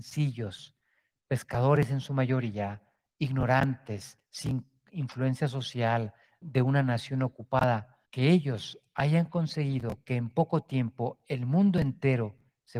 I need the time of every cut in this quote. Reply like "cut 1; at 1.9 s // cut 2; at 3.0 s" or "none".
cut 1; at 6.4 s // cut 2; at 8.1 s